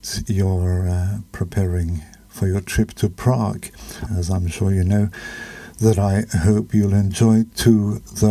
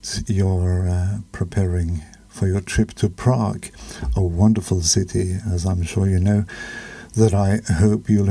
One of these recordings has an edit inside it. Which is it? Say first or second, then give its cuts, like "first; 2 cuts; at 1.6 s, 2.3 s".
first; 1 cut; at 4.1 s